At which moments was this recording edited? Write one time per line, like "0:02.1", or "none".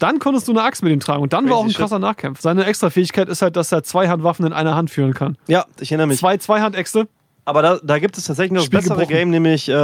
0:02.4
0:05.8